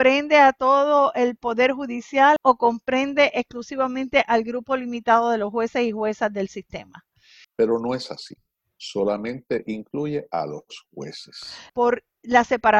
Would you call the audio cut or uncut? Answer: cut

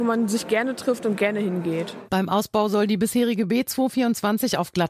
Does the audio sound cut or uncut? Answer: uncut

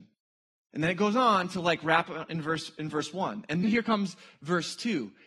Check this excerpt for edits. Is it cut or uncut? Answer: cut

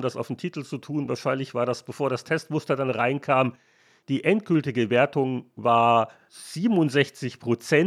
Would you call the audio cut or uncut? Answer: uncut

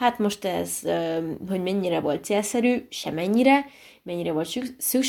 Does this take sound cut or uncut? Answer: uncut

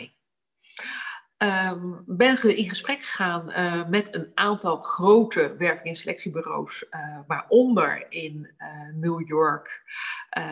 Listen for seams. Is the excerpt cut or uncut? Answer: uncut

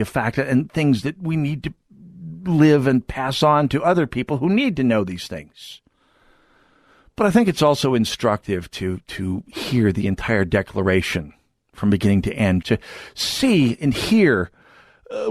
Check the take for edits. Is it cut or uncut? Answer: cut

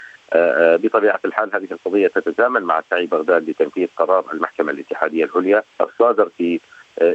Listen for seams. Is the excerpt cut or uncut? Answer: cut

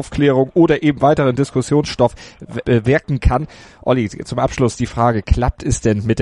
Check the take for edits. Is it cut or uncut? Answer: cut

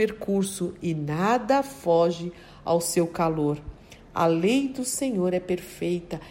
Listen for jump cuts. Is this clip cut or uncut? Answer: uncut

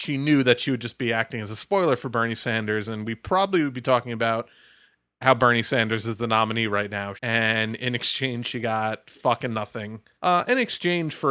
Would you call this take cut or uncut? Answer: cut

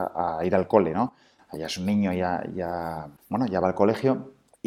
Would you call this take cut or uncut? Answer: cut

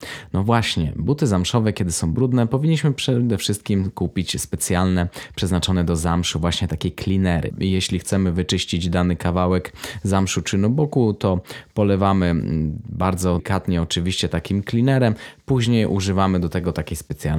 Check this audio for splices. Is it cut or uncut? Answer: cut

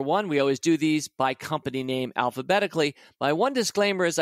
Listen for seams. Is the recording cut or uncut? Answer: uncut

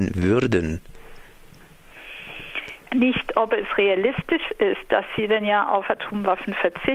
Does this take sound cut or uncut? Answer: cut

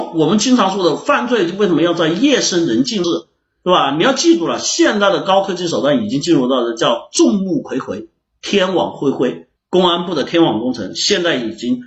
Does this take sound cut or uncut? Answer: cut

